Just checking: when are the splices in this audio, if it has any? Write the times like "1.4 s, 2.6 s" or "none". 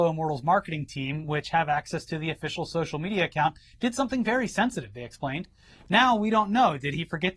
none